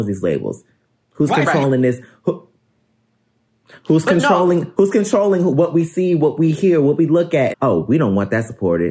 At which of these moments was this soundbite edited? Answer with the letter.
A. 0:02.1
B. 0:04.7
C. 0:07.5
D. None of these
C